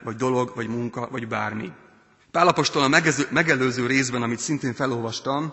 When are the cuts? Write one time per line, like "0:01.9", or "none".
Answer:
0:02.2